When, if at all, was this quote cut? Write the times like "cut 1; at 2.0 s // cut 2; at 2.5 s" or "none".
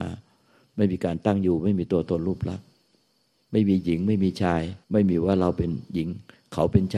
cut 1; at 4.8 s